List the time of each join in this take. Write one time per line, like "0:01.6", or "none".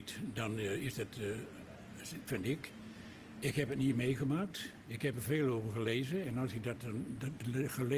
0:02.3